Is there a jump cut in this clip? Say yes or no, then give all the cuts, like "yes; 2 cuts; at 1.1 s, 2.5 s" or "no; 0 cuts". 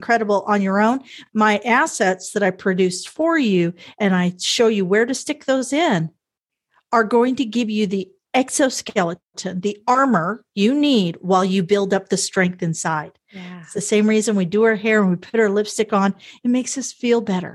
no; 0 cuts